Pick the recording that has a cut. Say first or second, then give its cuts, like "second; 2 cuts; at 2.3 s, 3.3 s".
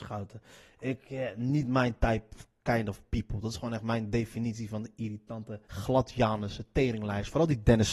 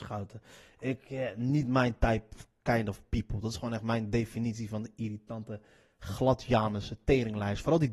first; 1 cut; at 5.6 s